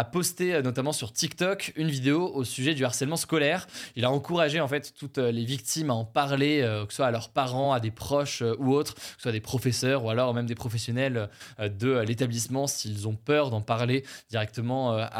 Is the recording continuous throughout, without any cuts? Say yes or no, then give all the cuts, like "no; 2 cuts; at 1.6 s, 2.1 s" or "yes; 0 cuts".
yes; 0 cuts